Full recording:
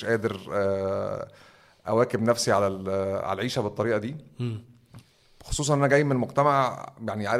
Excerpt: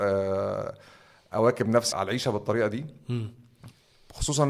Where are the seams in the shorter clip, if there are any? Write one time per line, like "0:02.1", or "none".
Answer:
0:01.9